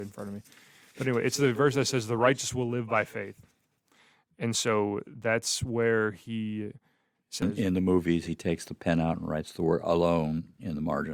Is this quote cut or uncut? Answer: uncut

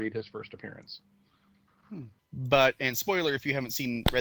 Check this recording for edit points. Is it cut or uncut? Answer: cut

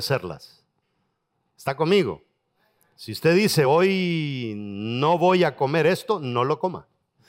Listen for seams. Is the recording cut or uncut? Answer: uncut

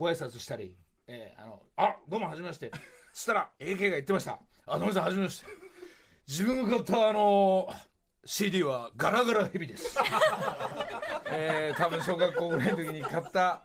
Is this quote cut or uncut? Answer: cut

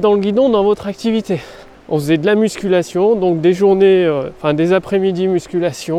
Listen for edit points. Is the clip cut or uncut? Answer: cut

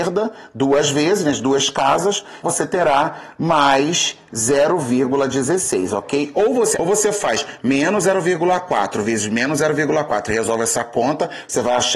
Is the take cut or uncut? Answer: cut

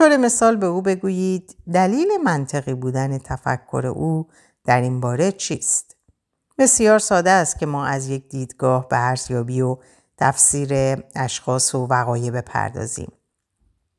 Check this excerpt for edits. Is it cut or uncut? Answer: cut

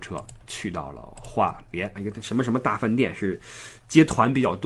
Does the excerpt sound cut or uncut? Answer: cut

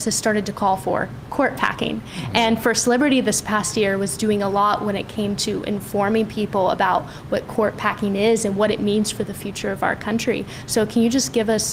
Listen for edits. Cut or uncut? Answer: uncut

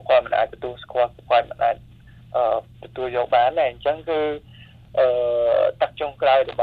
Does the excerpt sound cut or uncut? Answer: uncut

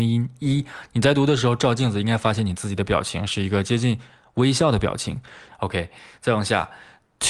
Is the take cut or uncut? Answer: cut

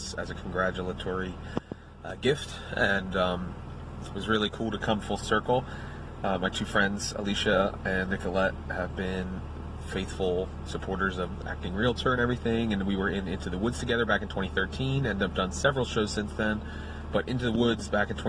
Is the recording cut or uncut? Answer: uncut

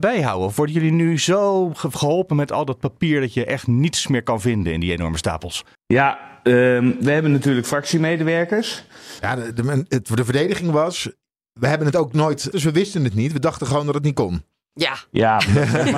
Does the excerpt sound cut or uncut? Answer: cut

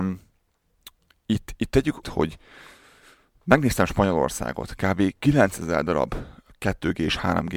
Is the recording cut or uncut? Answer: cut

